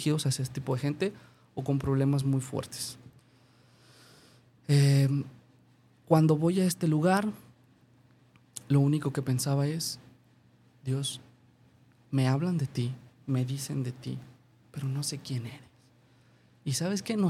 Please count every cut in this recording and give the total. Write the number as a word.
zero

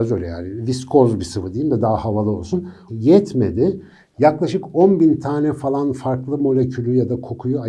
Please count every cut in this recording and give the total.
one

